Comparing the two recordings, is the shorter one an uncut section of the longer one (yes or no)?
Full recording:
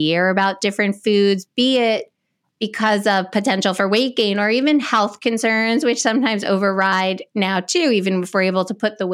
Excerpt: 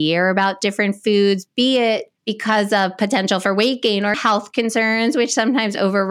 no